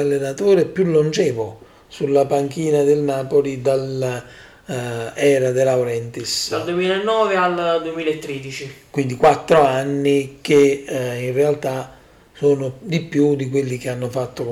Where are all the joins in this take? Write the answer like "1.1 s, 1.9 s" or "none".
none